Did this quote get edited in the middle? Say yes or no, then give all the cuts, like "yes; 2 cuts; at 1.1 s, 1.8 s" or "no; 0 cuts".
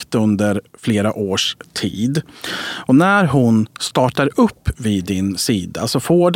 no; 0 cuts